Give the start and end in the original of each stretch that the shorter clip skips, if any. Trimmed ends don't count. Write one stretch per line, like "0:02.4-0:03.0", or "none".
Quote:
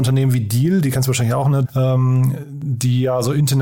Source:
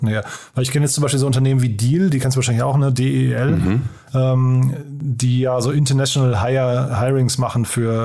0:02.9-0:04.0